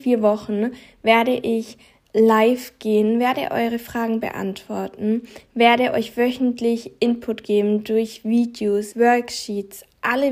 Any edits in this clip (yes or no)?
yes